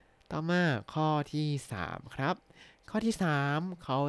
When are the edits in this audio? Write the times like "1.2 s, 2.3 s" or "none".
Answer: none